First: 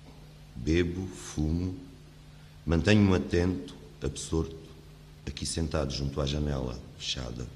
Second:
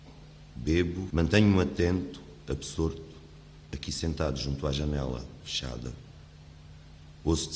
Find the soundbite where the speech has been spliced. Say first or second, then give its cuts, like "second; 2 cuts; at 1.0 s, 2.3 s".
second; 1 cut; at 1.1 s